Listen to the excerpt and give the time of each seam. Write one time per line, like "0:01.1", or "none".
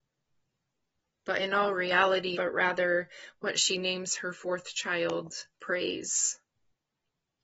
0:02.3
0:05.5